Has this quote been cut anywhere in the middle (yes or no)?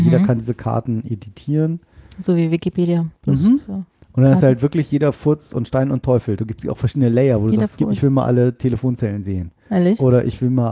no